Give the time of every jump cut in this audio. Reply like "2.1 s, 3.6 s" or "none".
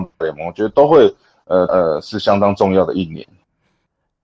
1.7 s